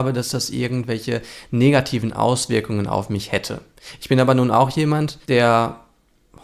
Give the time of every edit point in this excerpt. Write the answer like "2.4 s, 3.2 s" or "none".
5.2 s